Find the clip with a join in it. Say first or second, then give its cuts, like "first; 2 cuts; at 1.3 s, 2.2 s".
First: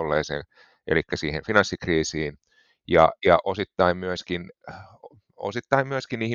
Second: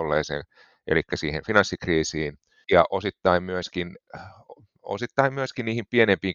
second; 1 cut; at 2.6 s